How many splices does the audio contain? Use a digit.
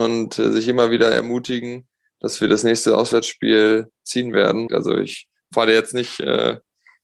1